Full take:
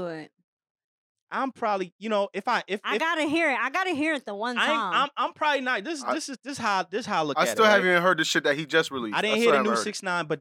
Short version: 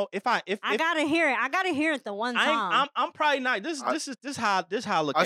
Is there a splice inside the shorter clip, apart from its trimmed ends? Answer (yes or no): no